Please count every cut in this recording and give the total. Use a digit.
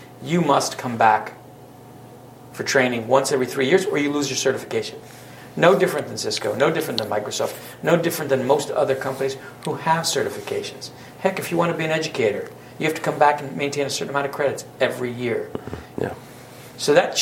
1